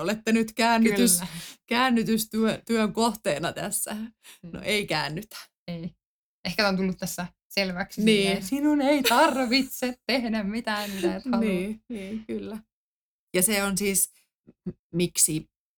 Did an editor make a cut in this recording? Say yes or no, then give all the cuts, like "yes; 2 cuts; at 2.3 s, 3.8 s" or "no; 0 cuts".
yes; 1 cut; at 14.8 s